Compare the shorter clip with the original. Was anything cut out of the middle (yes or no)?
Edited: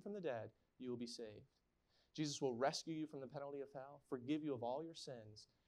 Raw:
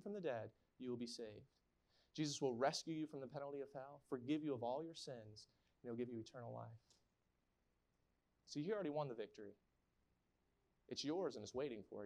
no